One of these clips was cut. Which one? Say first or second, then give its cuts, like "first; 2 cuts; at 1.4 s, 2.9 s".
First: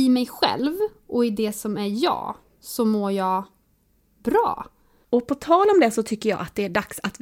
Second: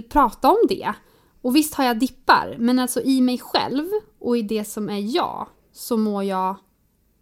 first; 1 cut; at 5.0 s